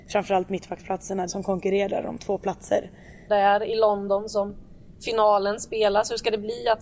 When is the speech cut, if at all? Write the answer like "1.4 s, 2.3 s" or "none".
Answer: 1.3 s, 3.3 s